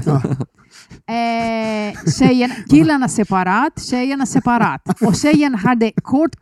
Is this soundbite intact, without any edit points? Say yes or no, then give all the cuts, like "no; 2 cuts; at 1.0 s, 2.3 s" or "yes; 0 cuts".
no; 2 cuts; at 2.7 s, 5.0 s